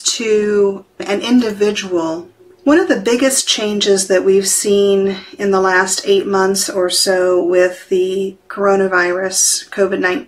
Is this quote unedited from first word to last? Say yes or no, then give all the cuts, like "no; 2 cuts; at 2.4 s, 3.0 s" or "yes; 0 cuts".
yes; 0 cuts